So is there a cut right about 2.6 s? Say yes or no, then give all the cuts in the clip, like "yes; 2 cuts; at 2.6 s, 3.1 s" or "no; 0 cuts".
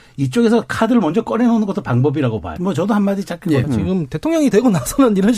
yes; 2 cuts; at 2.6 s, 3.6 s